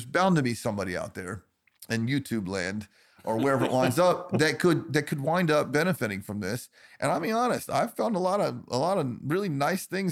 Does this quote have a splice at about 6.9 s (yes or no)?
no